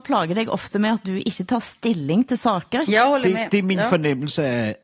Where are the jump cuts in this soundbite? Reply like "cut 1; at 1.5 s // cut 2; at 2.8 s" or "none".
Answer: cut 1; at 2.9 s